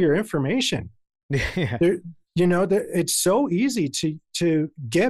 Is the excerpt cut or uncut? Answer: uncut